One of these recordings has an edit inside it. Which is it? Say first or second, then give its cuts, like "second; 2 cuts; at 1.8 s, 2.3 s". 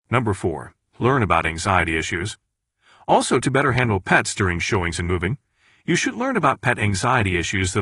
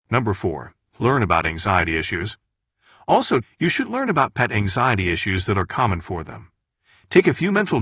second; 1 cut; at 3.4 s